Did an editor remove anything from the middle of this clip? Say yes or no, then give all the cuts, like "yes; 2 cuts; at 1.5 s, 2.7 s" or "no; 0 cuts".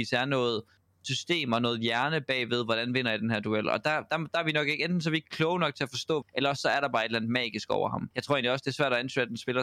yes; 2 cuts; at 6.2 s, 8.1 s